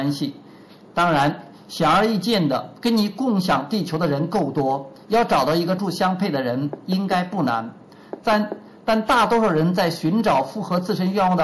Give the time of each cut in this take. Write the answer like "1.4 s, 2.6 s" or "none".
5.8 s